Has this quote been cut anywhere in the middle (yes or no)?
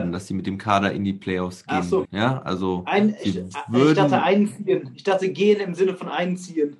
yes